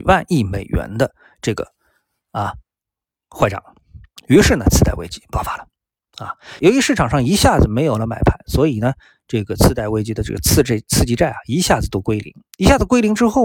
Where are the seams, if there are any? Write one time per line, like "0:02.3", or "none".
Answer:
0:06.6